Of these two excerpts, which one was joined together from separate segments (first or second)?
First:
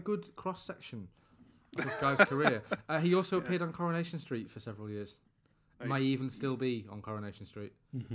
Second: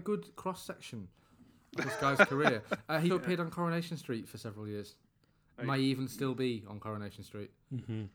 second